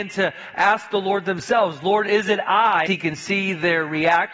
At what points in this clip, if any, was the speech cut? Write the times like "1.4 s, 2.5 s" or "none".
2.9 s